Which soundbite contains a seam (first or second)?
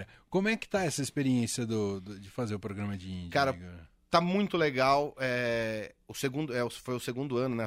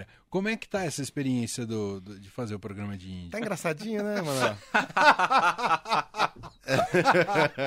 second